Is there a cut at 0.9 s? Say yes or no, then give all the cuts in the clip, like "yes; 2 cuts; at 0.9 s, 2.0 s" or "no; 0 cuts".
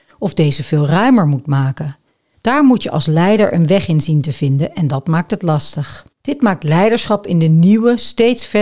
no; 2 cuts; at 2.3 s, 6.1 s